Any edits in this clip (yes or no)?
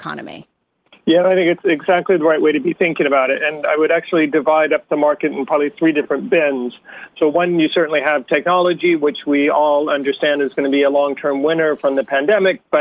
no